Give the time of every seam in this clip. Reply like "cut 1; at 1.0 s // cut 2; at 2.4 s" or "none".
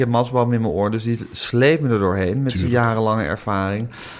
none